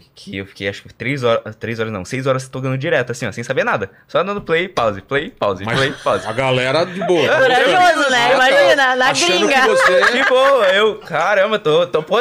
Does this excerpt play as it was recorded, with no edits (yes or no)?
yes